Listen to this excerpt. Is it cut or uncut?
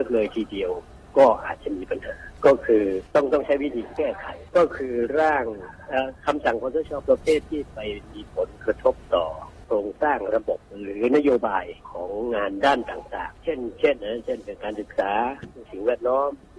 cut